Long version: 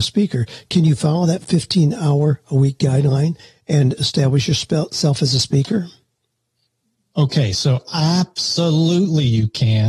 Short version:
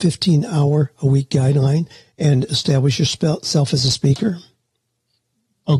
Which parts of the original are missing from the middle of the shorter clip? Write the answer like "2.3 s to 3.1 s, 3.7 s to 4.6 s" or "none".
none